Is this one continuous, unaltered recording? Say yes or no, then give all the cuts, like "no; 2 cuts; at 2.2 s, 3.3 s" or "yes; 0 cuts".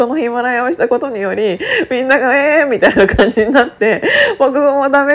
yes; 0 cuts